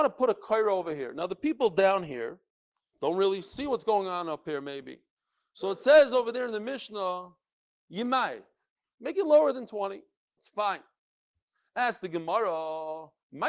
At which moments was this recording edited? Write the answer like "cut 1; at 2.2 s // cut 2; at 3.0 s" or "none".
cut 1; at 10.4 s